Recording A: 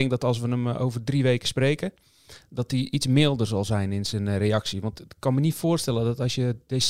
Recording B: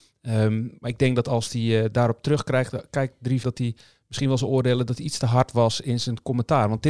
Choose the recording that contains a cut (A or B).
B